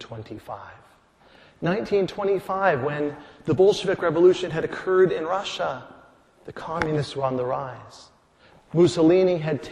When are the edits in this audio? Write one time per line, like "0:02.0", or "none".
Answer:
none